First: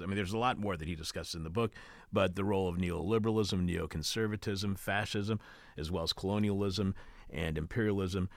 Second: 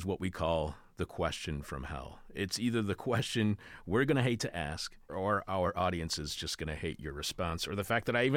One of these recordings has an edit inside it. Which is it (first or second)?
second